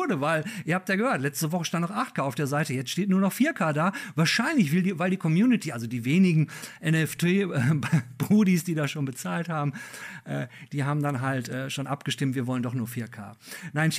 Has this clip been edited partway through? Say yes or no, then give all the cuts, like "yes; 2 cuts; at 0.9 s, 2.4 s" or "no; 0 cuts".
no; 0 cuts